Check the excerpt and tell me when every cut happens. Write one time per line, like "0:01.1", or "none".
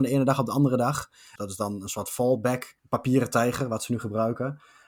0:01.4
0:02.8